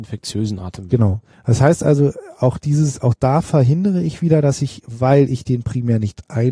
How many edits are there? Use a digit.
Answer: 1